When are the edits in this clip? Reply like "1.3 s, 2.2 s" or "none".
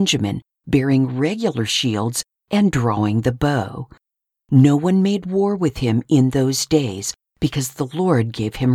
4.3 s